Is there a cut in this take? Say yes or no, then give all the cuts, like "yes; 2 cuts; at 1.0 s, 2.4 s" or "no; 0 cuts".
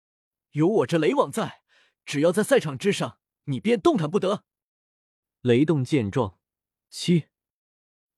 yes; 1 cut; at 6.8 s